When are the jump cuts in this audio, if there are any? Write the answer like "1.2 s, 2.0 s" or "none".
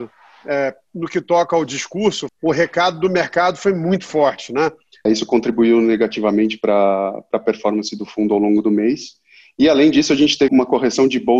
2.3 s, 5.1 s, 10.5 s